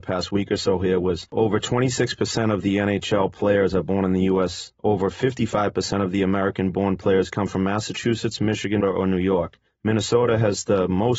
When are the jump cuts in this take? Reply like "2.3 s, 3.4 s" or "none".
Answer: 8.8 s